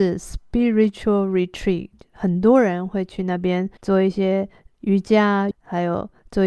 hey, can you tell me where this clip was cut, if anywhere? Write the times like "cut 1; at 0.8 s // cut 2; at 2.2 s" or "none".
cut 1; at 3.8 s // cut 2; at 5.5 s